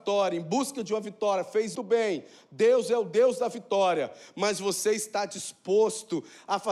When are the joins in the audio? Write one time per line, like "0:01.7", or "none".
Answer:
0:01.7

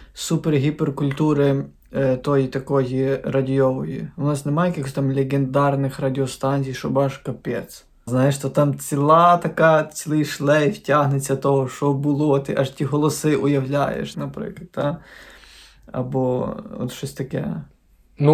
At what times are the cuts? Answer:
0:08.1
0:14.1

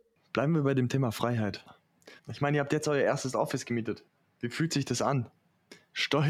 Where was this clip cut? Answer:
0:02.2

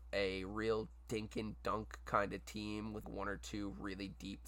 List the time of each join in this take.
0:03.0

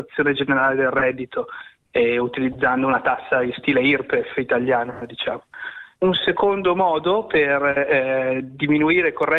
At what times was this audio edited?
0:05.9

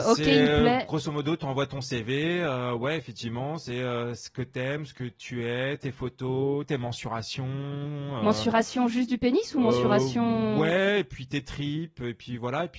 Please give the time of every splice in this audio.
none

